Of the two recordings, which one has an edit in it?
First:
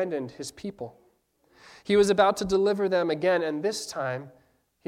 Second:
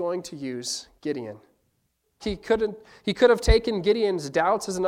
second; 1 cut; at 2.2 s

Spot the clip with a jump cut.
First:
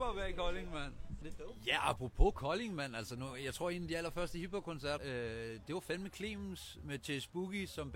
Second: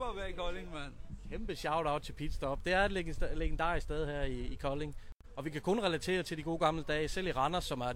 first; 2 cuts; at 1.2 s, 5.0 s

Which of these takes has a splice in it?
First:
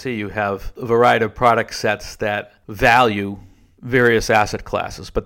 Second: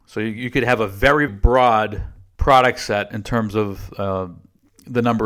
second; 1 cut; at 1.3 s

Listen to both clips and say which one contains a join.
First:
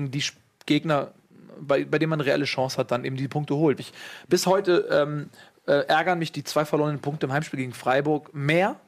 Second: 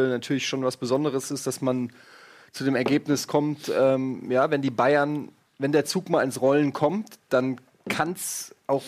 first; 1 cut; at 3.8 s

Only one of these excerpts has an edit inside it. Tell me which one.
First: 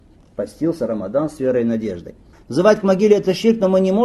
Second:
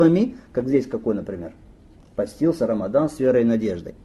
first; 1 cut; at 2.3 s

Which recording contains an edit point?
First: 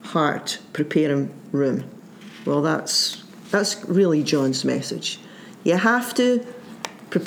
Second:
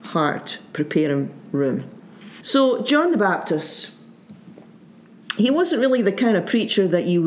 second; 1 cut; at 2.4 s

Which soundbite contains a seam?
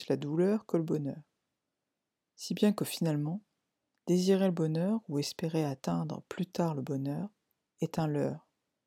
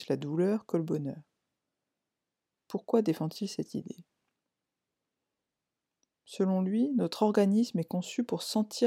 first; 1 cut; at 2.3 s

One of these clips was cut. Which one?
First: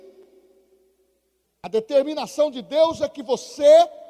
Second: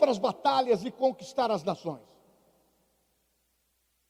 first; 1 cut; at 1.4 s

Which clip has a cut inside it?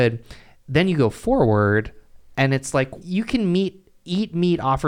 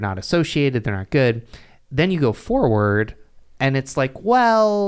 first; 1 cut; at 3.0 s

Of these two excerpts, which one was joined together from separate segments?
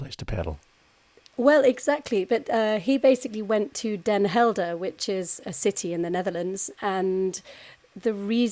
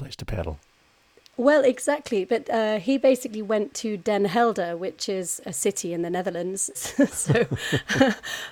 second; 1 cut; at 6.7 s

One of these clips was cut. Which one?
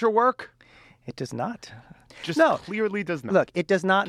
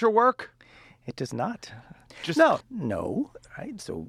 second; 1 cut; at 2.6 s

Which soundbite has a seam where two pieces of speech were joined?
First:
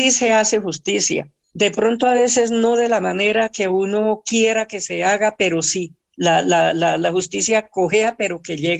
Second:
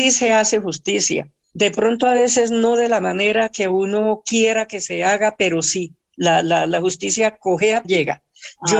second; 2 cuts; at 6.4 s, 7.8 s

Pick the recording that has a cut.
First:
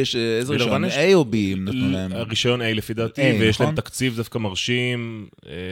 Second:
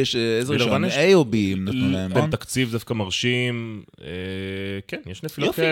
second; 1 cut; at 2.1 s

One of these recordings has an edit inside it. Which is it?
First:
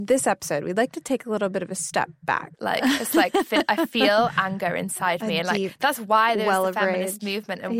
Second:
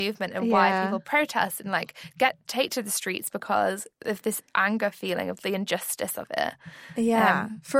first; 1 cut; at 2.5 s

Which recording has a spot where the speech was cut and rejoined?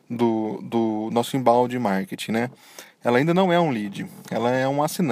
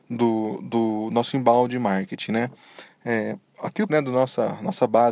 second; 2 cuts; at 2.9 s, 3.9 s

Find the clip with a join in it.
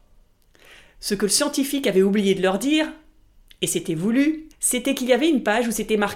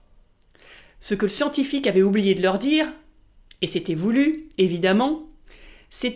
first; 1 cut; at 4.5 s

